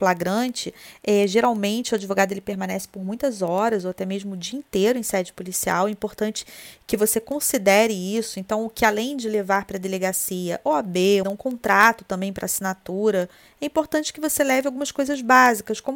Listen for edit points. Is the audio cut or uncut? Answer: cut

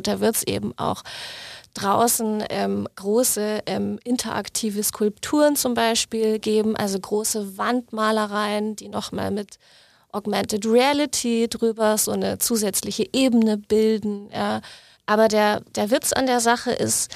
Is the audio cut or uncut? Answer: cut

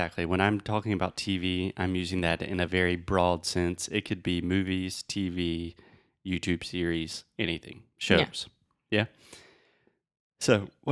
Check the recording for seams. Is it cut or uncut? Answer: uncut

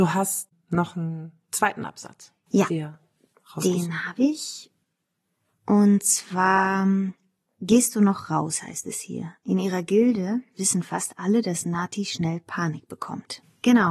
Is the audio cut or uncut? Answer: uncut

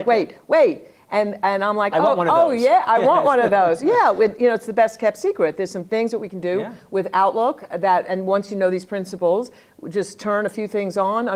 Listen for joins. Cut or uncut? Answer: uncut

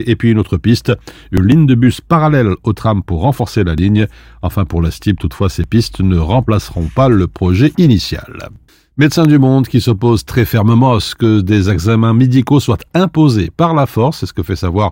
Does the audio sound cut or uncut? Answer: uncut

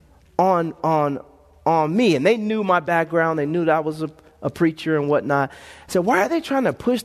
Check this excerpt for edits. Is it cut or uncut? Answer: uncut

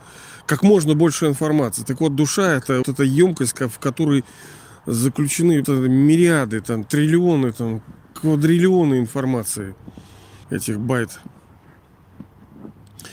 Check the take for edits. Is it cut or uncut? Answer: cut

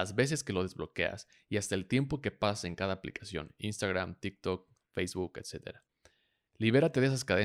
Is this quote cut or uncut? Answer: uncut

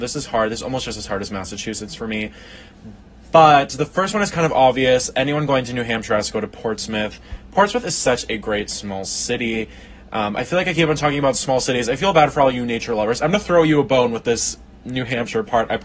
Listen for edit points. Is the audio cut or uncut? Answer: uncut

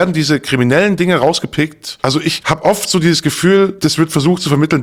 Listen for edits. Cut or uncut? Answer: uncut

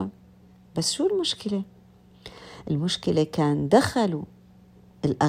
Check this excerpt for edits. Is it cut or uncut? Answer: uncut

